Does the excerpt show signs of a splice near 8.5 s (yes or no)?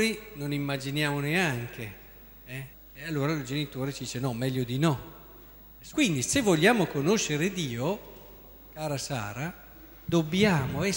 no